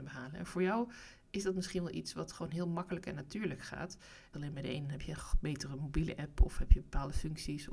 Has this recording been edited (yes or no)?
yes